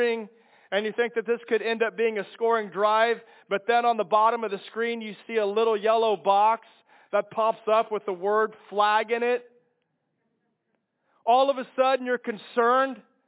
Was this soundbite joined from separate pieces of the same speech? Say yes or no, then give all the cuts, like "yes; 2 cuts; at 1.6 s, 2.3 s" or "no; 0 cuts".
no; 0 cuts